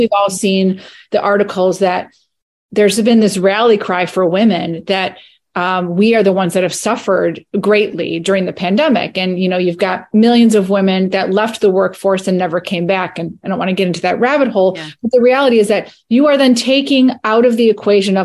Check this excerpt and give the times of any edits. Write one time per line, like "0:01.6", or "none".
none